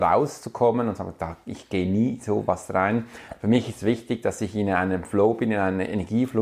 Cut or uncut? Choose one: uncut